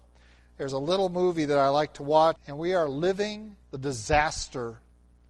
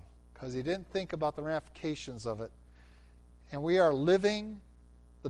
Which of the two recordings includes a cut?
first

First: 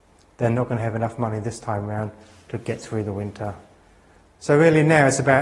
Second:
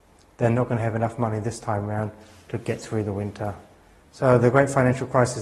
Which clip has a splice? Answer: second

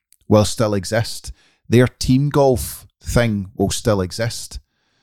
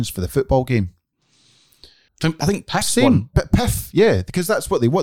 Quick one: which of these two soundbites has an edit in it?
second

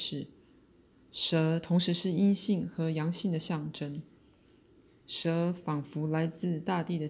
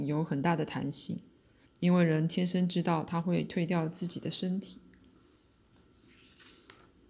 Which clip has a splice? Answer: second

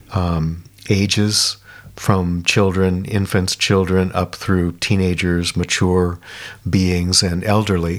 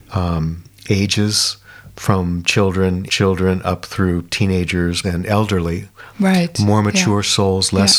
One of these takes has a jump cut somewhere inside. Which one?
second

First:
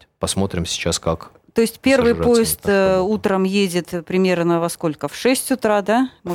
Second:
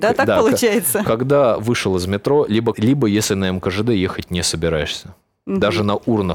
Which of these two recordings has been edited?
second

